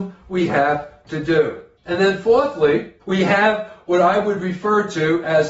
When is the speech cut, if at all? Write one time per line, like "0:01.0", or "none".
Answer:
0:01.8
0:03.0